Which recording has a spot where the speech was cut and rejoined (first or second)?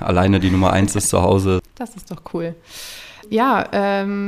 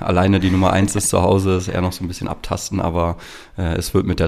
first